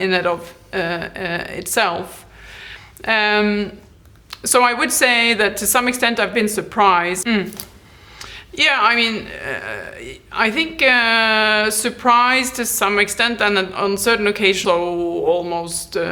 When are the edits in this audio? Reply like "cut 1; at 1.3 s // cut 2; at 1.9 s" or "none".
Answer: cut 1; at 7.2 s // cut 2; at 14.6 s